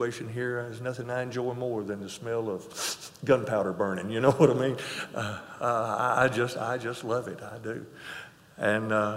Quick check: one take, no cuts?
yes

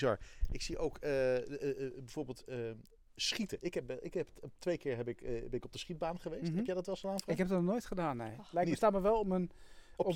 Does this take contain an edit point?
no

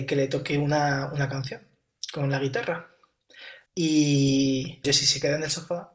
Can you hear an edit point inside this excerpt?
yes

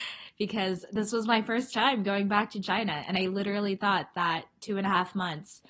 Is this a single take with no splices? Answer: yes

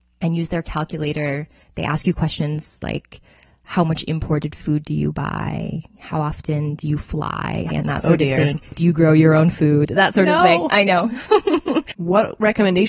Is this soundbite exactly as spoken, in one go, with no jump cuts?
no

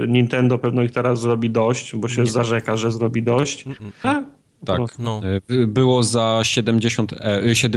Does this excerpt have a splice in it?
yes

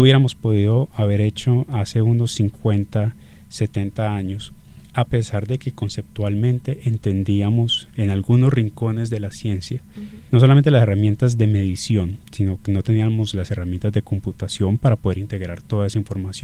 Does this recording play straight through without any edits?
no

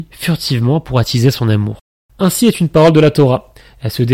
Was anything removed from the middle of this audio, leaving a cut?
no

